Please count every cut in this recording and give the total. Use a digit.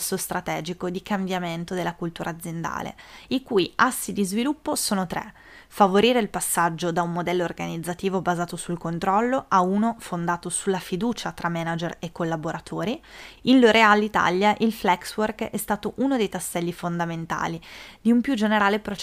1